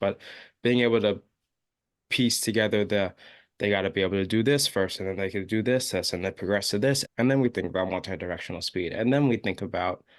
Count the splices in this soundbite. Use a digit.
1